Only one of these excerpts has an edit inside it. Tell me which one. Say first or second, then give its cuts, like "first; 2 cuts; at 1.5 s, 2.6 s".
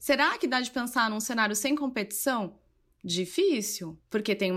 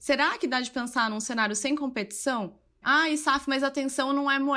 second; 1 cut; at 2.8 s